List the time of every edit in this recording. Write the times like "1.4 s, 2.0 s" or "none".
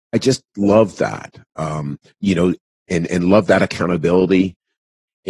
none